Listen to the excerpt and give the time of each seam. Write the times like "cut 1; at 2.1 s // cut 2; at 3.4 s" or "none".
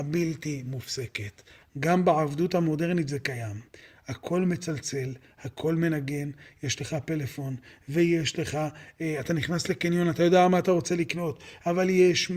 cut 1; at 1.6 s